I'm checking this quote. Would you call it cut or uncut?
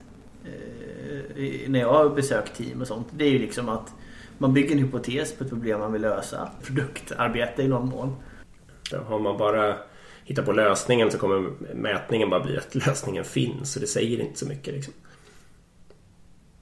cut